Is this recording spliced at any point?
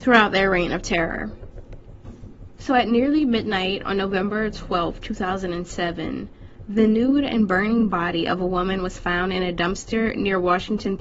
no; 0 cuts

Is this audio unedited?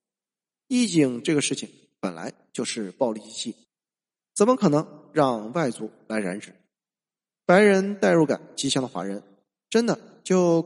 yes; 0 cuts

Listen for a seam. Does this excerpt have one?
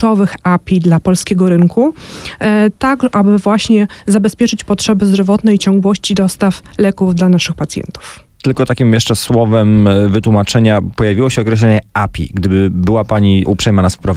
no; 0 cuts

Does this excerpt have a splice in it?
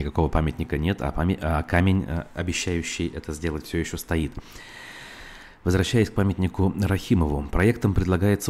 no; 0 cuts

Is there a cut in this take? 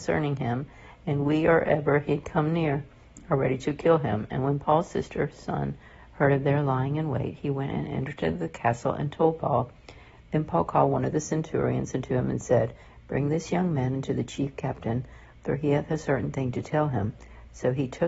no; 0 cuts

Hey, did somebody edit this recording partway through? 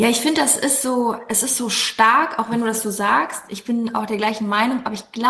no; 0 cuts

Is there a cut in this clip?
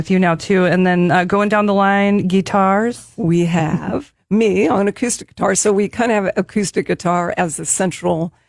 no; 0 cuts

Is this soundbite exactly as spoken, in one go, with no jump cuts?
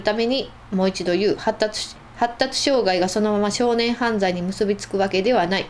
no; 1 cut; at 2.0 s

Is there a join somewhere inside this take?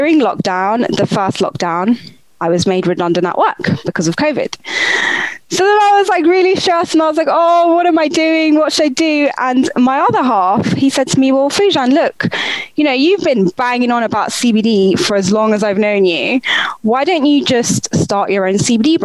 no; 0 cuts

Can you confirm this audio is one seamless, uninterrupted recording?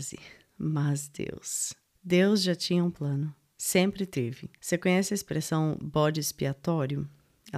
no; 2 cuts; at 1.9 s, 4.6 s

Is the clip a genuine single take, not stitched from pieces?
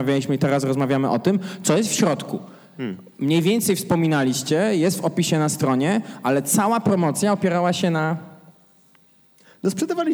yes; 0 cuts

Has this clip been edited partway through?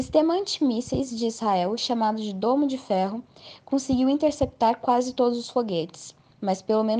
no; 0 cuts

